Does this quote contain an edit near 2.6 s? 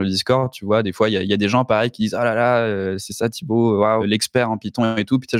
no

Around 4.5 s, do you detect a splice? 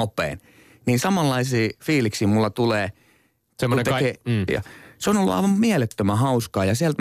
yes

